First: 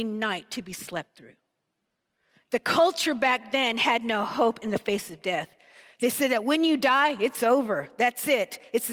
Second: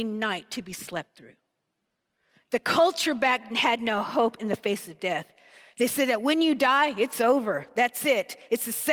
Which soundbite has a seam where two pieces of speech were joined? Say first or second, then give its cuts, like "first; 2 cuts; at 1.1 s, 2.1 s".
second; 1 cut; at 3.5 s